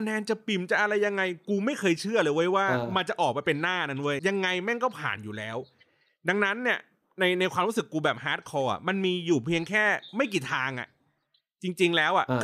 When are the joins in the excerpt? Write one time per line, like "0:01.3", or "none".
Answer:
0:04.2